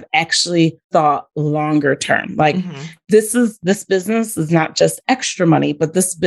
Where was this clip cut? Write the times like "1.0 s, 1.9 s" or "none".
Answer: none